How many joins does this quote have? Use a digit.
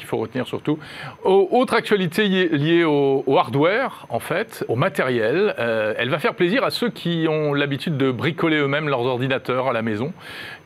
2